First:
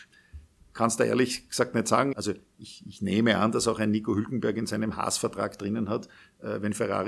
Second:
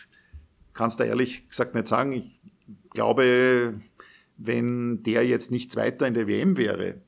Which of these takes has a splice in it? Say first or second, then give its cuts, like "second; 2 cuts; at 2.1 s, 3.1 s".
first; 1 cut; at 2.1 s